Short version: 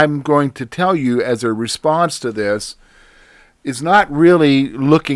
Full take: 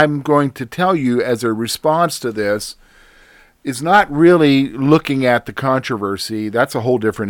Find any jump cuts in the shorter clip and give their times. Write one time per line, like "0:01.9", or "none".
none